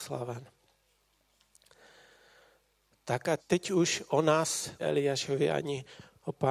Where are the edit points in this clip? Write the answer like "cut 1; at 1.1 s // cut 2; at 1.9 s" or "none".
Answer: cut 1; at 3.4 s // cut 2; at 4.8 s